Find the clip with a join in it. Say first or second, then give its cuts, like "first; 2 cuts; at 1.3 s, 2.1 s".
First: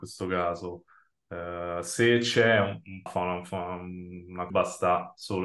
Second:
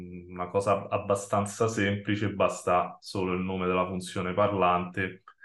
first; 2 cuts; at 3.1 s, 4.5 s